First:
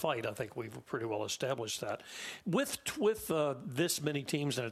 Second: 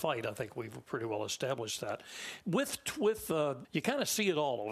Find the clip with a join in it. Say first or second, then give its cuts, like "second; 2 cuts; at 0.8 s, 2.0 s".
second; 1 cut; at 3.6 s